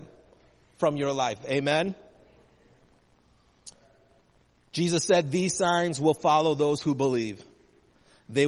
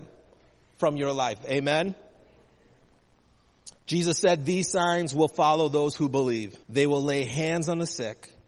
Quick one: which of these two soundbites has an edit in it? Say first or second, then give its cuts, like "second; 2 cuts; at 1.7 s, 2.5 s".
second; 2 cuts; at 3.8 s, 6.6 s